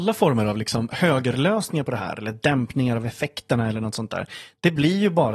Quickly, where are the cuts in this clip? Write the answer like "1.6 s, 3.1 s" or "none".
none